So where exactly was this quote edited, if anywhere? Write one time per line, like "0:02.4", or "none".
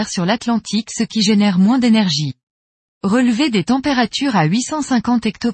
0:02.9